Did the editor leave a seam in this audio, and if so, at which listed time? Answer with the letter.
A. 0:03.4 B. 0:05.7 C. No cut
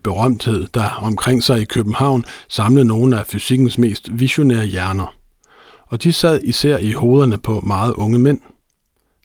C